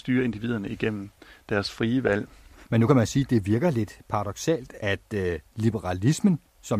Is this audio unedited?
yes; 0 cuts

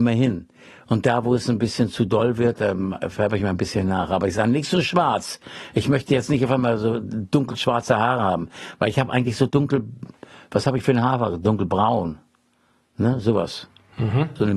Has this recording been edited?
no; 0 cuts

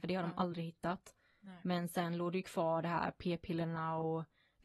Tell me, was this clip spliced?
no; 0 cuts

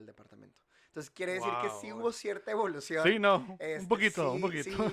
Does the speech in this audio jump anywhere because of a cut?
no; 0 cuts

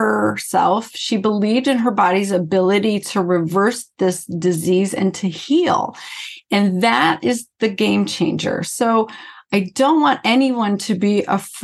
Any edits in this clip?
no; 0 cuts

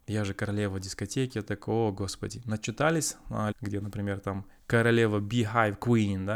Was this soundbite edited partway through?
yes; 1 cut; at 3.5 s

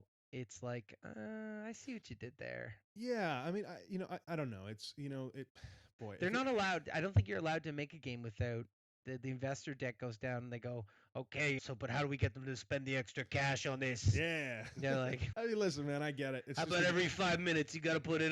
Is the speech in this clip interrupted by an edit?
yes; 3 cuts; at 9.0 s, 11.6 s, 15.3 s

